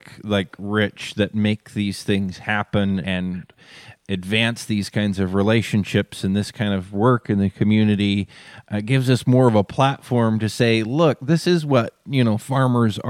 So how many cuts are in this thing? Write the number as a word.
one